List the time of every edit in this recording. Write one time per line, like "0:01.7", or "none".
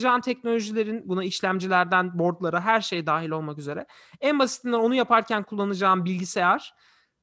0:01.0